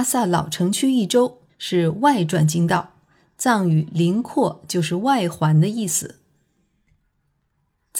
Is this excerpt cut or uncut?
cut